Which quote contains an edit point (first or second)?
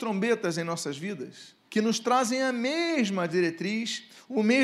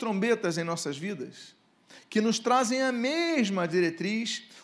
first